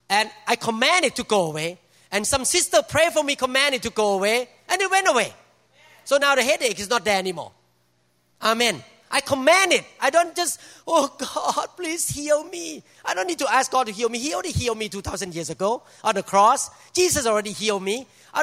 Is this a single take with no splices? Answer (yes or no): yes